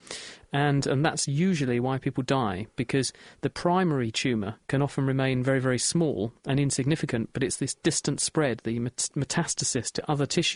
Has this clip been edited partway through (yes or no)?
no